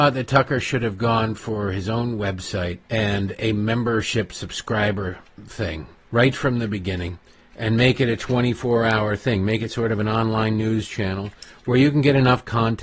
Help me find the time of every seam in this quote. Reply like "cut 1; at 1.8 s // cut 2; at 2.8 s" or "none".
cut 1; at 2.8 s // cut 2; at 6.0 s